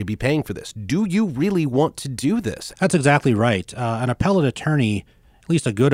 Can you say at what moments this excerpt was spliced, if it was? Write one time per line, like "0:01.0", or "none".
0:02.7